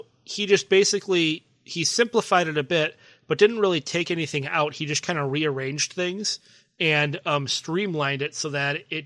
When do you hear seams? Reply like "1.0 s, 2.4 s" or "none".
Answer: none